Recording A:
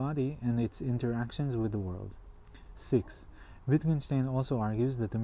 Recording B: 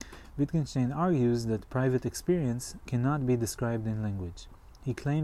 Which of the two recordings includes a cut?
B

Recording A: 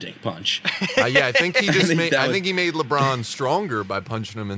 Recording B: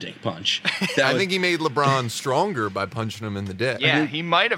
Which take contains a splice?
B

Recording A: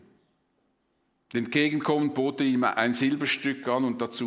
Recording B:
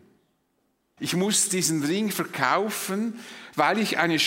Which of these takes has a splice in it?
B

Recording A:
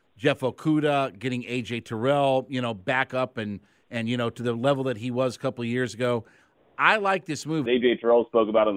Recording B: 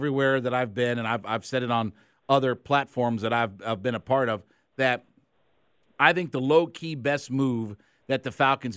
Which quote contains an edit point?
A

